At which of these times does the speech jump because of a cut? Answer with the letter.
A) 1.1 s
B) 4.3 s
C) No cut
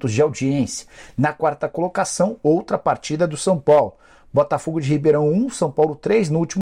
C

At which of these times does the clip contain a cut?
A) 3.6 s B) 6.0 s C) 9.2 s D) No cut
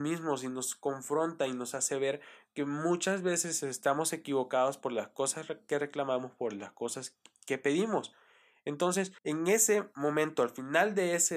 C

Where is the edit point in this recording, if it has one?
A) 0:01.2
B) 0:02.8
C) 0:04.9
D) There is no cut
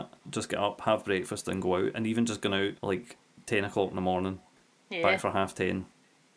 B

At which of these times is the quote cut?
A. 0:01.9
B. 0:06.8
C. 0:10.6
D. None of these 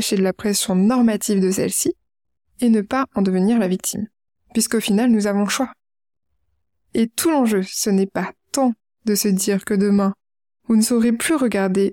D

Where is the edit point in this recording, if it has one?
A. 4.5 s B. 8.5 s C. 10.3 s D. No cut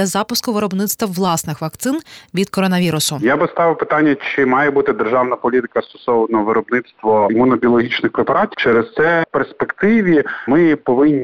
B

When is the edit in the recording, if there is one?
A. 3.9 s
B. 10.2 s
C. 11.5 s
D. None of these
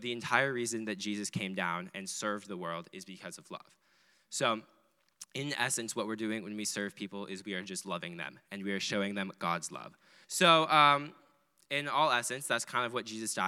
B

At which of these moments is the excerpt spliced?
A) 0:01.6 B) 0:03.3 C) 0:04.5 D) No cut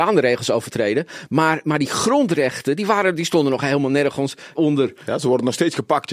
C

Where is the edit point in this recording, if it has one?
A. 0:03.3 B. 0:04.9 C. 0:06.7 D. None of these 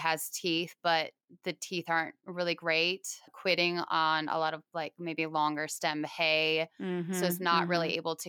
D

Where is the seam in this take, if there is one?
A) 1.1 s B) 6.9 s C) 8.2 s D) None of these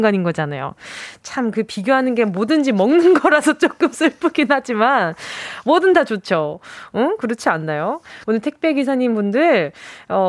C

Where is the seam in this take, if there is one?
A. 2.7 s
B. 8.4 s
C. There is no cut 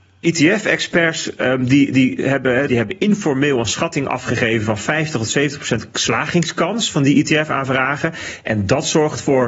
A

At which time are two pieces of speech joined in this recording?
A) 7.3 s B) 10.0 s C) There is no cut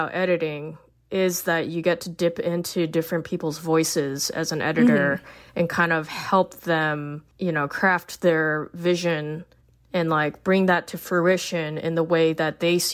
A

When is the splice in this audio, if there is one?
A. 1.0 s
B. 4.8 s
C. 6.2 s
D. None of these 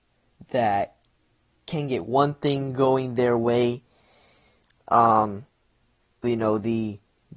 C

